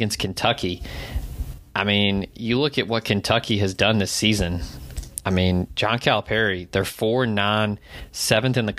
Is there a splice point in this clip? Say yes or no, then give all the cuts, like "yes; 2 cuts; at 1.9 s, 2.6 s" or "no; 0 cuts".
no; 0 cuts